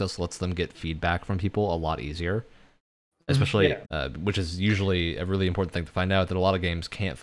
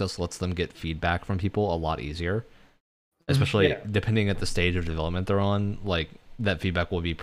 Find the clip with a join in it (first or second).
first